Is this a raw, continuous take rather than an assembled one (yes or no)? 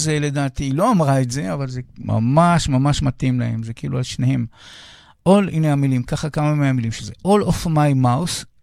yes